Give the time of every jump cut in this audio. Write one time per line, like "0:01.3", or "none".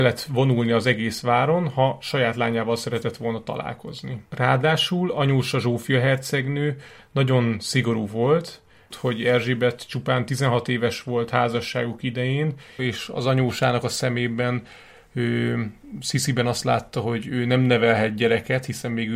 0:04.3
0:08.9
0:12.8